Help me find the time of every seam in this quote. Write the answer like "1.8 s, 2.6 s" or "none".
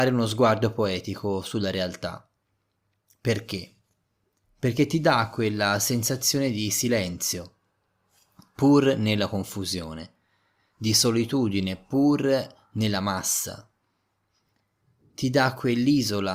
none